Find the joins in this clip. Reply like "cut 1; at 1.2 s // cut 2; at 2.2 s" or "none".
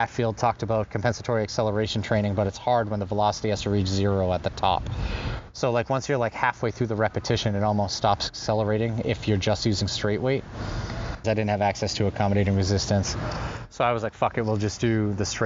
cut 1; at 11.2 s